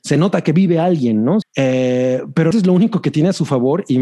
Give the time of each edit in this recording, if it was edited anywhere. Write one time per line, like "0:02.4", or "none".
0:01.4
0:02.5